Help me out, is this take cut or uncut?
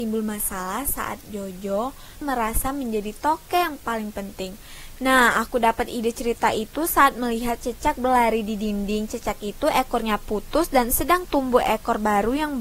cut